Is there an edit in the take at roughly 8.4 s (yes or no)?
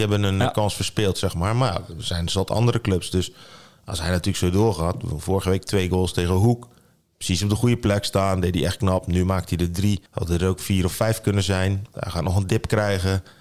no